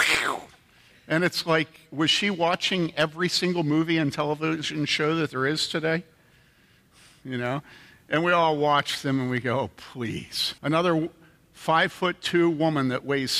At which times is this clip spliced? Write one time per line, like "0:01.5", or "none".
0:10.6